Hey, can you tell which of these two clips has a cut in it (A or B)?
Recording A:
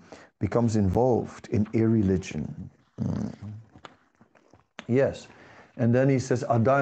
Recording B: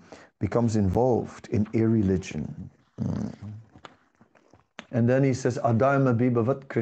B